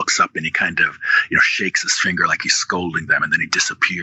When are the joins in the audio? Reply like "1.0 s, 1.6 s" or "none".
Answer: none

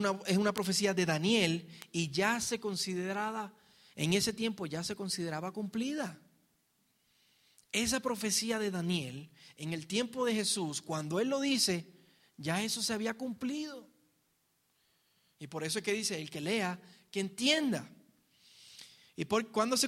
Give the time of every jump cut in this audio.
none

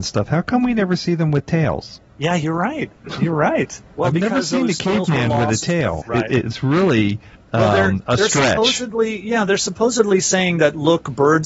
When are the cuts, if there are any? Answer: 6.0 s

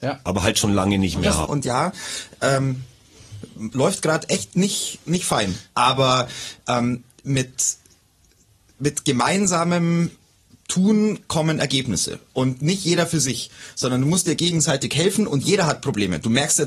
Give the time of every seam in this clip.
1.5 s

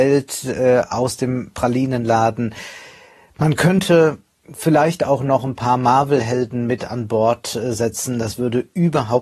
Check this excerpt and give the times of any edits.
none

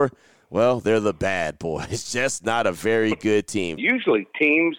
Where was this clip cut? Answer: 3.8 s

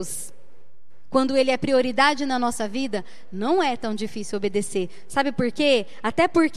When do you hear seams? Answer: none

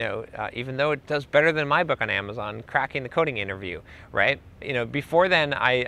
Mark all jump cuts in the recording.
4.6 s

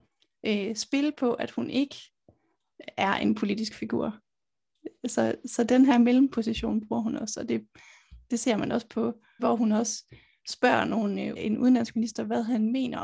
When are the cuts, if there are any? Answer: 9.4 s, 11.4 s

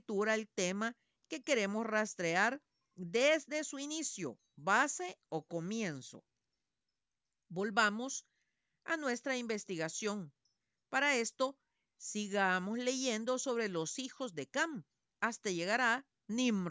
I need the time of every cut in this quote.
none

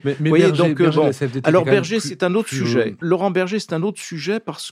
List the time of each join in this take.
3.0 s

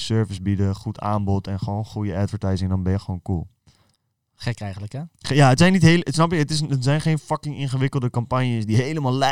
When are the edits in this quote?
none

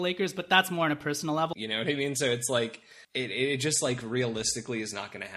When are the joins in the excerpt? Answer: 1.5 s, 3.0 s

